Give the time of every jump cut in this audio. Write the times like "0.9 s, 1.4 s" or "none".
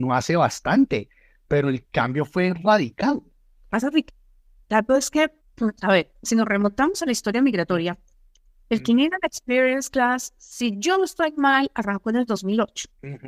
none